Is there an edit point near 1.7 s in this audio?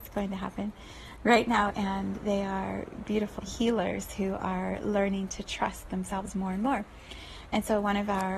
yes; 2 cuts; at 1.7 s, 3.4 s

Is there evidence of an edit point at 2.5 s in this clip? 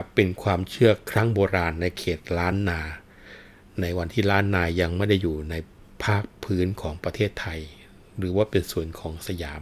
no; 0 cuts

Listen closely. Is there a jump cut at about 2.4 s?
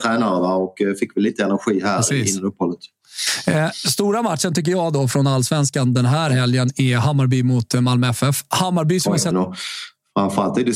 no; 1 cut; at 9.3 s

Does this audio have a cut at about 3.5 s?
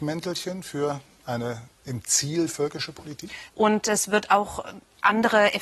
yes; 1 cut; at 3.5 s

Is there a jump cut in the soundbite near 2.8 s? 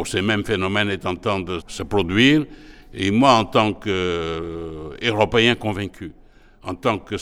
no; 1 cut; at 1.6 s

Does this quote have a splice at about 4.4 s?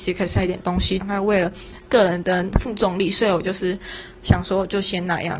no; 1 cut; at 1.0 s

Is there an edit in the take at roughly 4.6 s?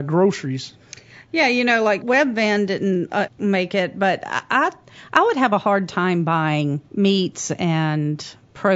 no; 3 cuts; at 2.0 s, 3.3 s, 6.9 s

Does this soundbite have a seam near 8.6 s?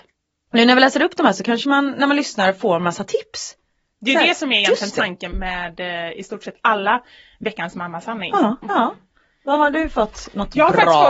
yes; 2 cuts; at 5.3 s, 8.6 s

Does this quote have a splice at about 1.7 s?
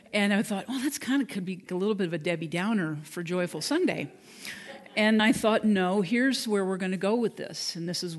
yes; 2 cuts; at 1.7 s, 5.2 s

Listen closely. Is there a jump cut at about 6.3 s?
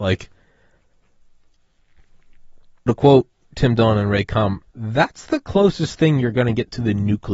no; 2 cuts; at 2.9 s, 4.6 s

